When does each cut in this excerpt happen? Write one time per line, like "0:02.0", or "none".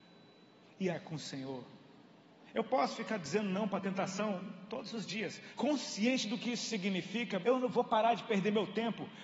0:00.9
0:05.5
0:07.4